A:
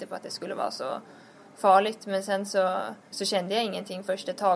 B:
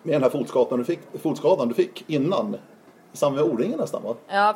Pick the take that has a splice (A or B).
A